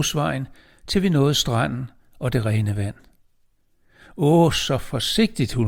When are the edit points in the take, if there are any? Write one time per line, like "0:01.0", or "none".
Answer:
none